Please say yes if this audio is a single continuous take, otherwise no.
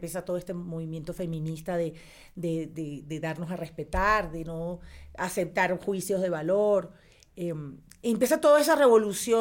yes